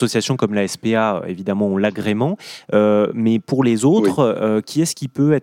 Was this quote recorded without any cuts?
yes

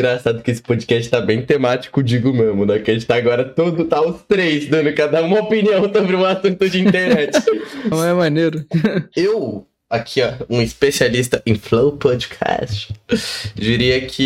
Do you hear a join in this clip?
yes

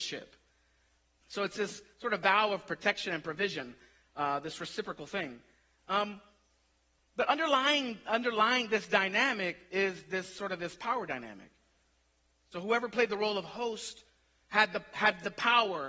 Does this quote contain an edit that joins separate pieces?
yes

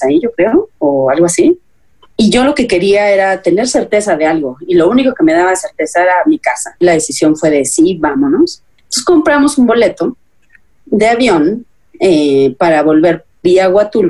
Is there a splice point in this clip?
no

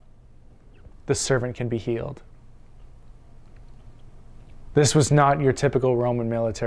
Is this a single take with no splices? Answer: no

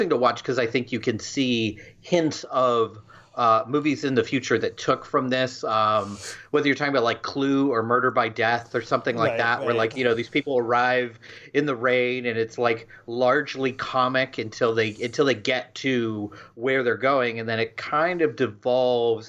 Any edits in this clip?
no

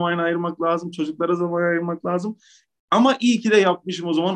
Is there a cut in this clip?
no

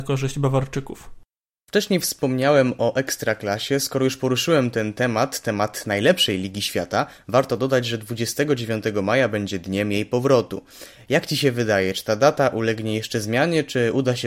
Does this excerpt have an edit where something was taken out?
no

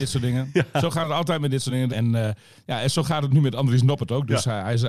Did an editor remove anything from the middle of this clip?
yes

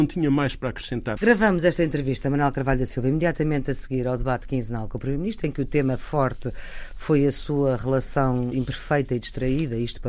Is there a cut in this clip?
yes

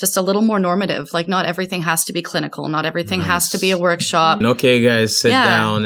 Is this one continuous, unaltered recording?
no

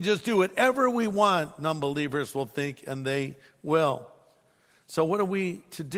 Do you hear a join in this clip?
no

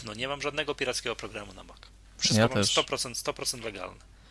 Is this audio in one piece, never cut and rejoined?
yes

